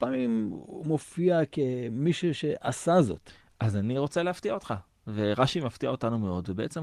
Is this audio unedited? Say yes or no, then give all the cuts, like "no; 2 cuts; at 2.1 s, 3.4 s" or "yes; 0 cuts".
yes; 0 cuts